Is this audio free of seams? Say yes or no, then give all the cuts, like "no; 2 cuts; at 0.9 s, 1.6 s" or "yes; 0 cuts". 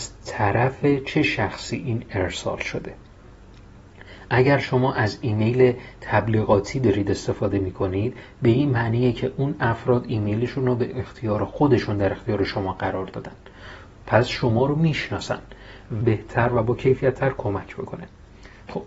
no; 1 cut; at 16.0 s